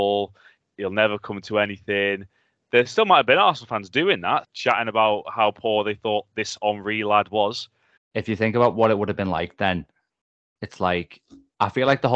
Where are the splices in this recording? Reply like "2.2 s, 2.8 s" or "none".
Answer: 4.4 s, 8.0 s